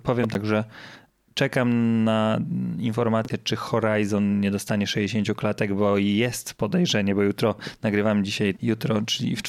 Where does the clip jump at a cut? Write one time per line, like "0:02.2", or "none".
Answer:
0:08.6